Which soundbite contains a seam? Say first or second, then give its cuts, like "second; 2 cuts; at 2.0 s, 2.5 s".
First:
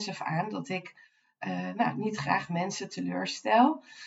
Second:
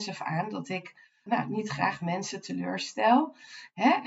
second; 1 cut; at 1.3 s